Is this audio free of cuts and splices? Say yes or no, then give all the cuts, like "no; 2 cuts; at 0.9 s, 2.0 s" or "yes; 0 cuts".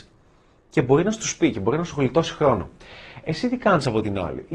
yes; 0 cuts